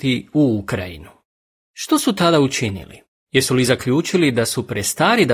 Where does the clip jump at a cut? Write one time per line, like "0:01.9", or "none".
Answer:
none

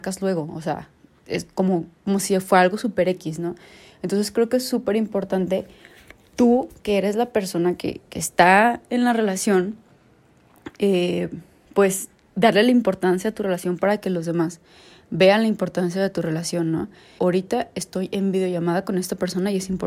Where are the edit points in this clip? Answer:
0:17.2

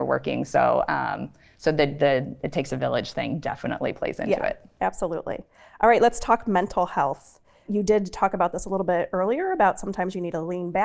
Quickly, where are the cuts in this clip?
none

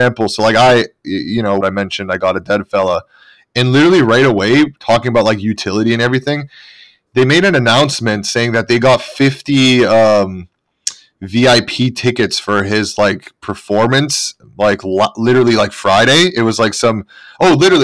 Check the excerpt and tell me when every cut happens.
0:01.6

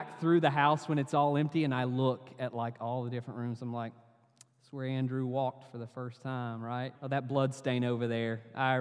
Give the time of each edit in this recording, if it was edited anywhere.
0:06.9

